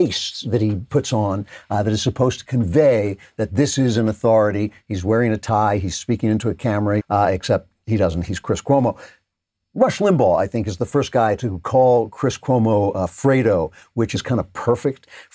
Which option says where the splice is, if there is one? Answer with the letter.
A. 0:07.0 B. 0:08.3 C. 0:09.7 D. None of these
A